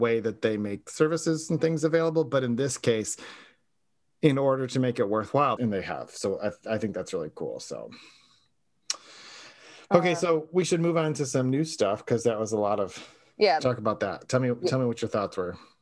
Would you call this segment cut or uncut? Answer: cut